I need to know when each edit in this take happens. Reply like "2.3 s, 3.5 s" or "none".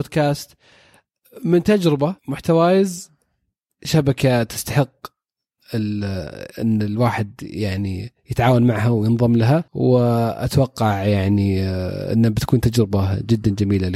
2.2 s, 9.7 s